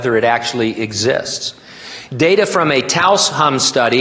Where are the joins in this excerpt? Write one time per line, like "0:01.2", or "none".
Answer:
0:02.1

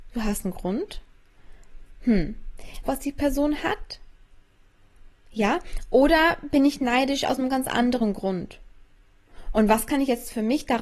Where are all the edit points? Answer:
0:02.8

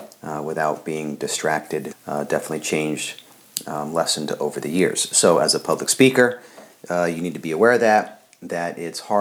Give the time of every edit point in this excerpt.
0:01.9

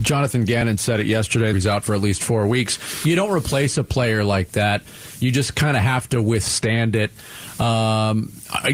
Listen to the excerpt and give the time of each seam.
0:01.5

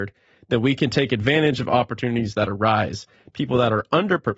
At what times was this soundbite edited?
none

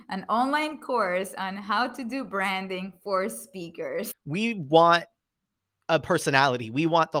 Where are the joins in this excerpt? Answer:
0:04.1

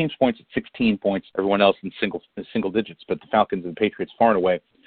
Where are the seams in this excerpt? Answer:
0:01.3

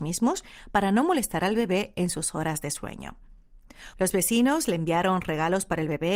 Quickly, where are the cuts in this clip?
0:03.9

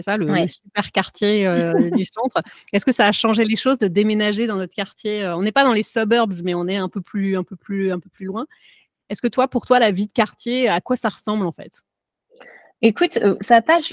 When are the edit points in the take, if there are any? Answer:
none

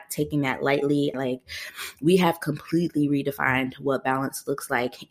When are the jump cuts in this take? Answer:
0:01.1

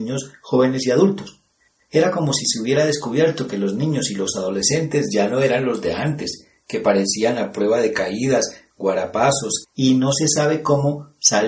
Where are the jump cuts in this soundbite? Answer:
0:09.6

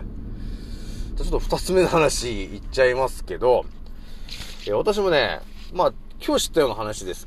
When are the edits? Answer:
0:01.2

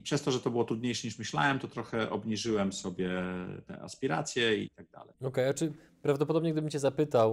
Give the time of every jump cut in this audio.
0:04.6

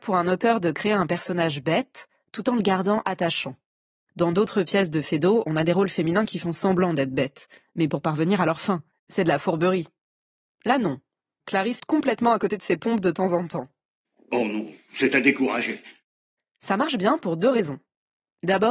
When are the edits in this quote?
0:11.8

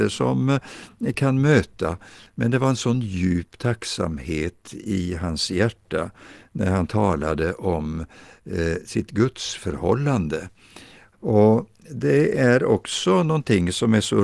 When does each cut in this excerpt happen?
0:08.8
0:11.1

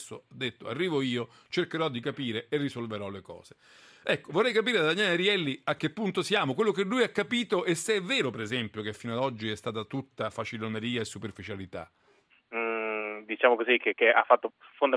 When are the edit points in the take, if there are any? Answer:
0:12.3

